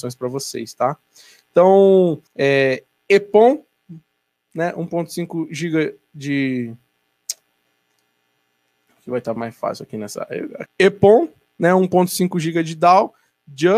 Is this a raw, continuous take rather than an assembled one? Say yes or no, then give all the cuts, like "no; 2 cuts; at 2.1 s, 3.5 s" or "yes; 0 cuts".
no; 2 cuts; at 2.3 s, 10.7 s